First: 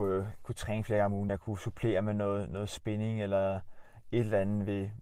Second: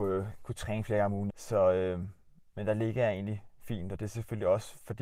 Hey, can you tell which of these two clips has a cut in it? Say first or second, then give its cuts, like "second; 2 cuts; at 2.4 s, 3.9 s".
second; 1 cut; at 1.3 s